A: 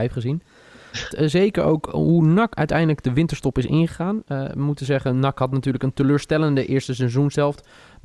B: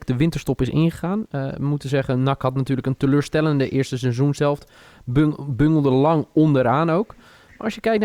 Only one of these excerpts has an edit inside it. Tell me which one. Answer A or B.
A